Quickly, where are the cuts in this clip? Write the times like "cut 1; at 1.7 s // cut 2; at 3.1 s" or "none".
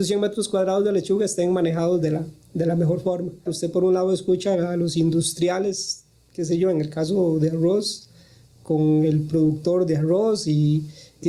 cut 1; at 3.5 s